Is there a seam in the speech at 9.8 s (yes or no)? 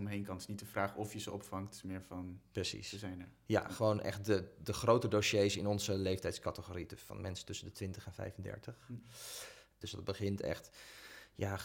yes